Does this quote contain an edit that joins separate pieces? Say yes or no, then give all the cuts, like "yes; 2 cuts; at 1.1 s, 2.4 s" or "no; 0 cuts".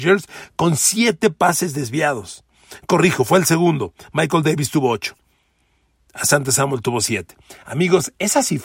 no; 0 cuts